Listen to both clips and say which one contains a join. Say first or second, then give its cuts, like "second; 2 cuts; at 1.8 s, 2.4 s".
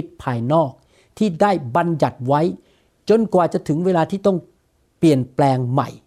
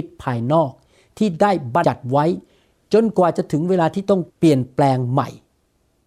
second; 2 cuts; at 1.8 s, 4.3 s